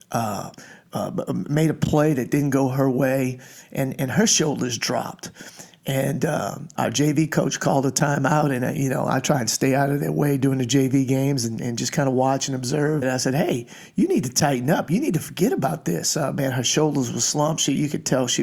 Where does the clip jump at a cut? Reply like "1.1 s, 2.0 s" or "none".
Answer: 6.8 s, 13.0 s